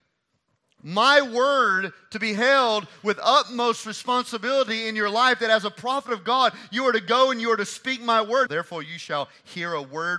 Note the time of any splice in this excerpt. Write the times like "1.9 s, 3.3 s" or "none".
8.5 s